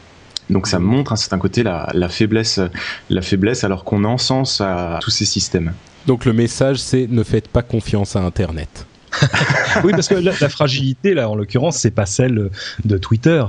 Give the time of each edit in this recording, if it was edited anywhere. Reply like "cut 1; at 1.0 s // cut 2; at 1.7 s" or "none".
cut 1; at 5.0 s